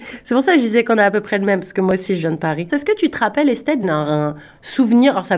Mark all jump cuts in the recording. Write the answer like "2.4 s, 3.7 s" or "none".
2.7 s, 3.8 s

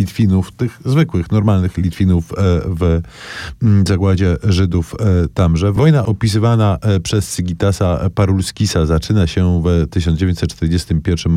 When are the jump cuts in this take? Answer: none

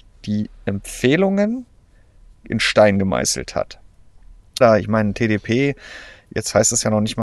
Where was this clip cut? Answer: 4.6 s

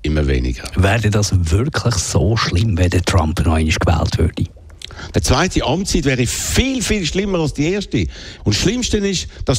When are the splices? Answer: 5.1 s, 8.4 s

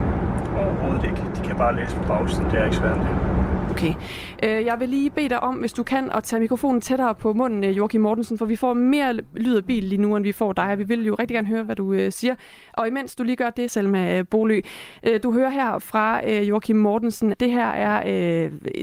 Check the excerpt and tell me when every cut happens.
13.7 s, 17.3 s

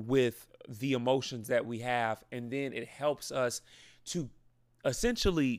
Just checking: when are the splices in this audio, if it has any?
none

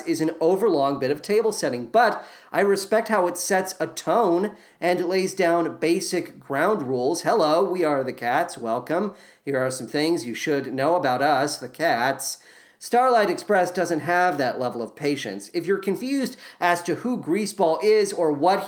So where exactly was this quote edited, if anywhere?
none

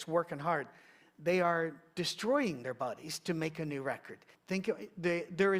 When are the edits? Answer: 4.3 s

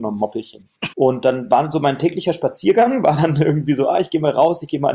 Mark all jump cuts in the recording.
0.9 s

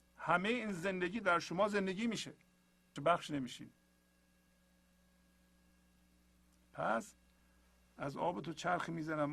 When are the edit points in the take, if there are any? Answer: 3.0 s

